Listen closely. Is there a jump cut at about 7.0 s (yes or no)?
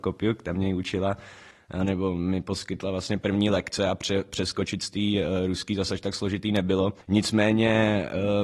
yes